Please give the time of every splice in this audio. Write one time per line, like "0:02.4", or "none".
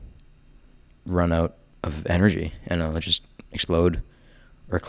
none